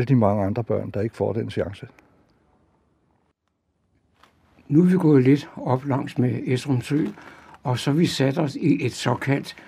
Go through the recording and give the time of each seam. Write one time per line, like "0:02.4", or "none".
none

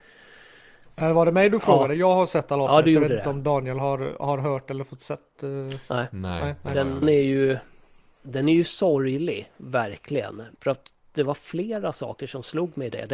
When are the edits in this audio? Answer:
0:07.0
0:10.5

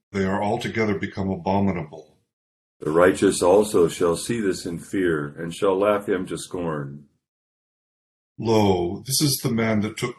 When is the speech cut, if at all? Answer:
0:02.6

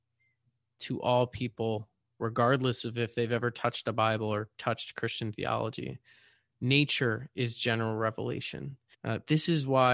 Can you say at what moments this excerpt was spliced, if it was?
0:08.9

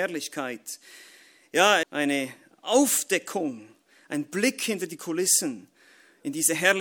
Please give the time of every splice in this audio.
0:01.8

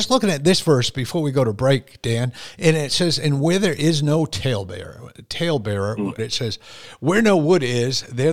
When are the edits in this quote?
0:06.2

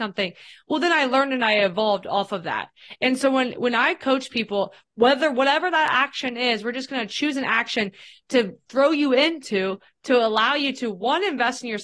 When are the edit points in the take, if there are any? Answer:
0:04.8

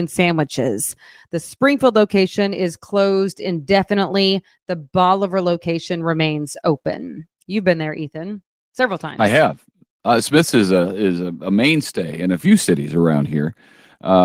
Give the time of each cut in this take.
none

